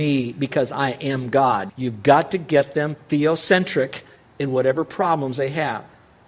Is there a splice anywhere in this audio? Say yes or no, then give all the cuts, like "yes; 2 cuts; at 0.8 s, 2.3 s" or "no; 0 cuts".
yes; 1 cut; at 1.7 s